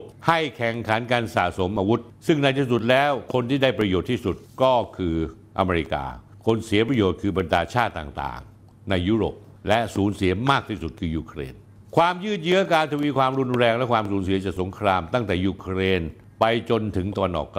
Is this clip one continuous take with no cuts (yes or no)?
yes